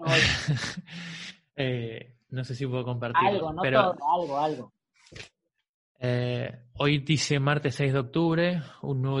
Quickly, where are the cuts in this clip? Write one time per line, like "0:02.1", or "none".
none